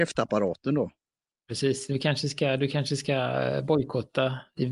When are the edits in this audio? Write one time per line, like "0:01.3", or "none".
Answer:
none